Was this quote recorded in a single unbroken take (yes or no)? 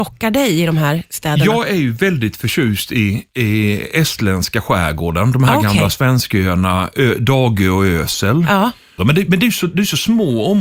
no